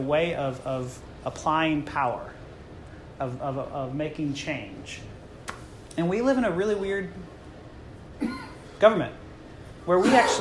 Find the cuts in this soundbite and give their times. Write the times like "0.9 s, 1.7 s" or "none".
1.2 s